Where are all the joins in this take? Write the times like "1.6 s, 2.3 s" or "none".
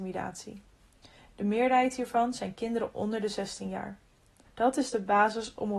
4.4 s